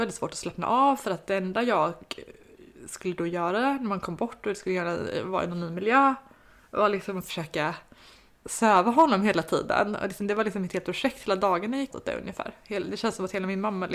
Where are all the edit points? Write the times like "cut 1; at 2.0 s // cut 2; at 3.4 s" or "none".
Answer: cut 1; at 11.9 s